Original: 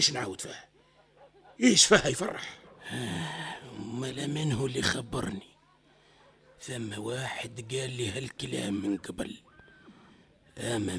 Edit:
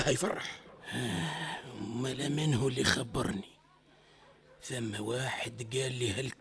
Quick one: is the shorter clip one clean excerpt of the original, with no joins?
yes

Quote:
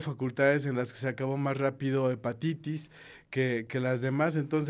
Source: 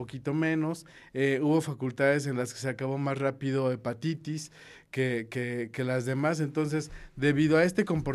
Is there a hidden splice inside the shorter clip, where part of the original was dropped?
yes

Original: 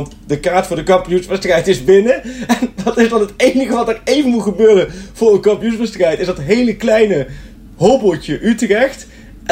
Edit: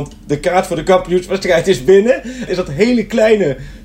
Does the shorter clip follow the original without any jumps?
no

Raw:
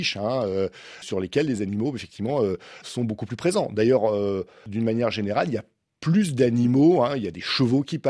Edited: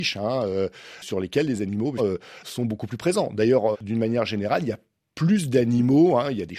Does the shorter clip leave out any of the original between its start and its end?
yes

